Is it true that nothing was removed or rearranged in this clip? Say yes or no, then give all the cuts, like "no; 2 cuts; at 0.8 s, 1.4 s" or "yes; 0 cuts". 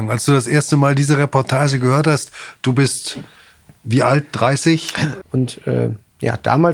no; 1 cut; at 5.2 s